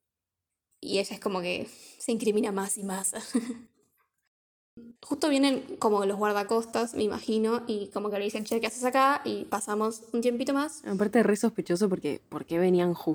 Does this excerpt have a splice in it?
yes; 1 cut; at 5.0 s

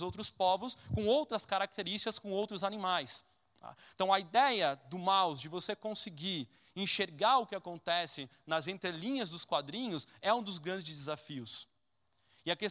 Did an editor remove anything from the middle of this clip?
no; 0 cuts

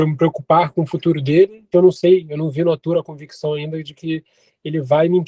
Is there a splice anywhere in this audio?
yes; 1 cut; at 1.7 s

